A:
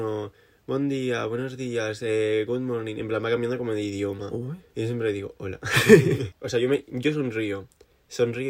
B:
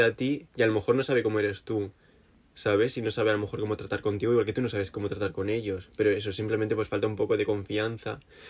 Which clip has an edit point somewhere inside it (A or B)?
A